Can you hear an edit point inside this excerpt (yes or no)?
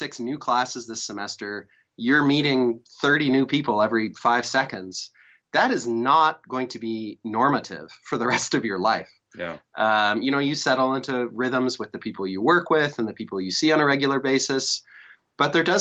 no